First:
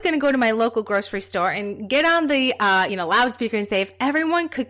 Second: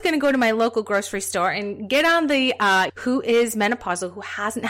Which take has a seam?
second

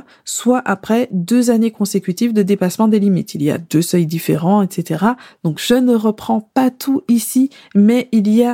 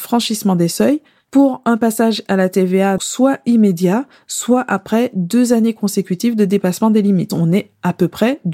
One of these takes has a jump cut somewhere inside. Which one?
second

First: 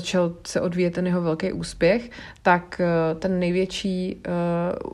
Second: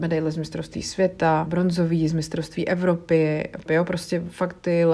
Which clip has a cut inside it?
second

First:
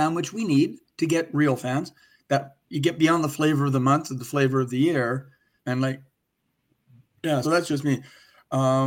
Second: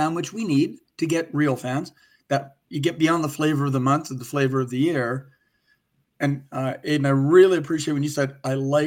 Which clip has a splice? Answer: first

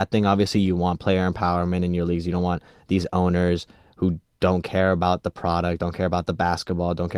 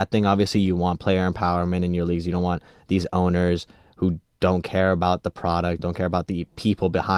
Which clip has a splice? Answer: second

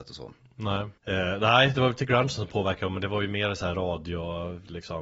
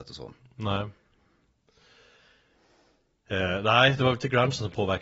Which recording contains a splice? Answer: first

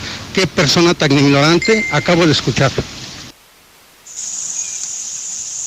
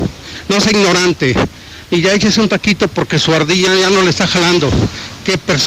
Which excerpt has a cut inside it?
second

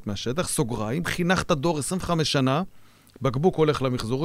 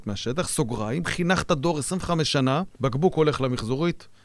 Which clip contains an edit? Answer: second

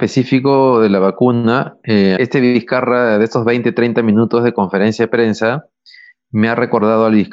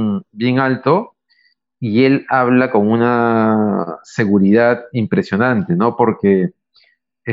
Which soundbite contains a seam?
first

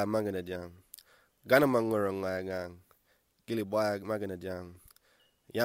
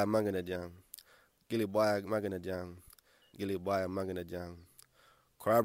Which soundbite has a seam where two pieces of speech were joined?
second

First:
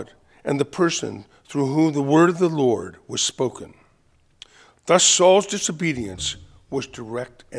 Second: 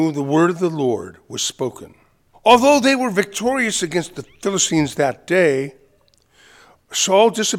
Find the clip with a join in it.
second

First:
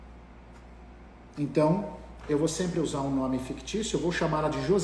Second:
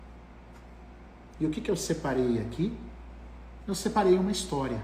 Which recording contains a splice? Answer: second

